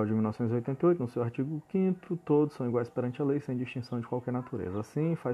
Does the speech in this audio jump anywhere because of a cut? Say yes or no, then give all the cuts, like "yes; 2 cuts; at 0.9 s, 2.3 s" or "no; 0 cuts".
no; 0 cuts